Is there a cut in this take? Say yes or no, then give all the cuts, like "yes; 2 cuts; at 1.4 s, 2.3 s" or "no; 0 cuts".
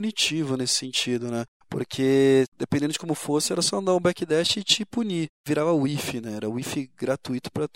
no; 0 cuts